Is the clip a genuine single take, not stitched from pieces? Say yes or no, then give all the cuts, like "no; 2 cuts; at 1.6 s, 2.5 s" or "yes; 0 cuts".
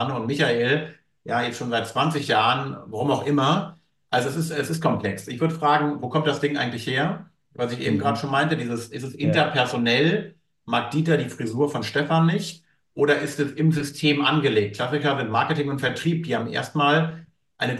yes; 0 cuts